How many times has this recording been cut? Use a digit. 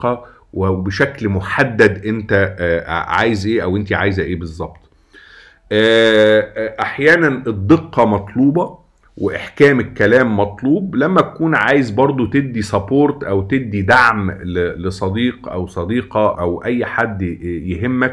1